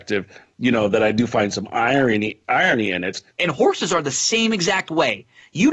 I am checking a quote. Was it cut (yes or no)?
yes